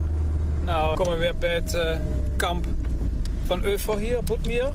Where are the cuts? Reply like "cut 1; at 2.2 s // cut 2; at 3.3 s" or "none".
cut 1; at 0.9 s